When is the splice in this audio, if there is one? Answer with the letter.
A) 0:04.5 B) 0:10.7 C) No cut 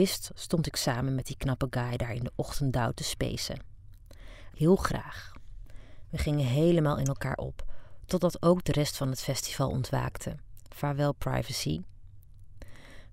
A